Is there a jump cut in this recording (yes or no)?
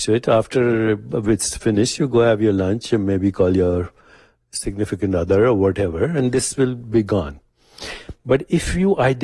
no